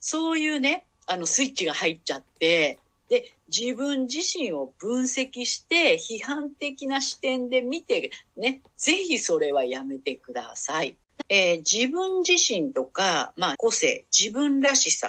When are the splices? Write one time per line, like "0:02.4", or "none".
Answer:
0:08.7
0:11.2
0:13.5

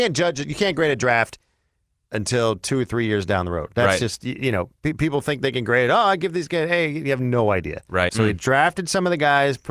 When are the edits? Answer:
0:08.1

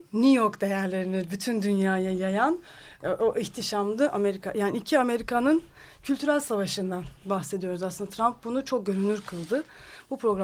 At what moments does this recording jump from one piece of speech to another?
0:07.2

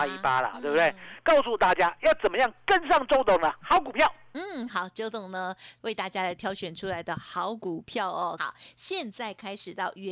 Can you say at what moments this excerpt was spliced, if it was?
0:04.7
0:08.4

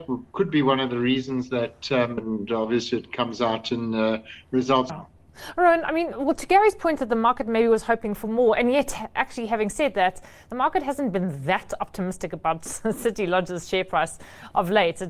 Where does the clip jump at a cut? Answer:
0:02.2
0:04.9
0:06.1

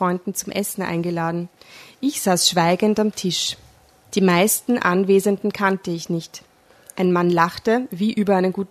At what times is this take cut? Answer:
none

